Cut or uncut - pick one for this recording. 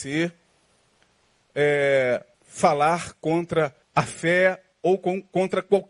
cut